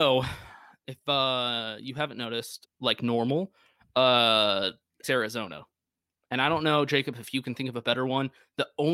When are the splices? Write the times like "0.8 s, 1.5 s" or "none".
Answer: 2.6 s, 5.0 s